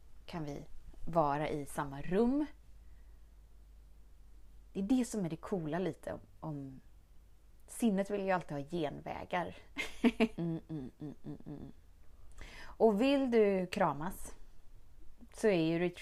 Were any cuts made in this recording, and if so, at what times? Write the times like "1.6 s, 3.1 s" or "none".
10.4 s